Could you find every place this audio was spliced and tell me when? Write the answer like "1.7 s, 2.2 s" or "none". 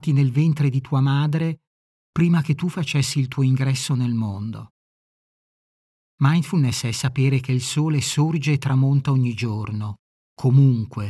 6.0 s